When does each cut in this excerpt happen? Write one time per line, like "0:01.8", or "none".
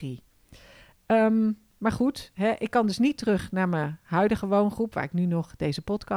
none